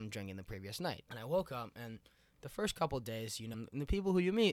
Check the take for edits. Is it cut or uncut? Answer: cut